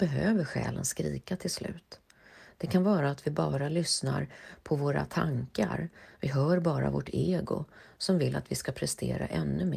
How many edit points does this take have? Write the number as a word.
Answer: zero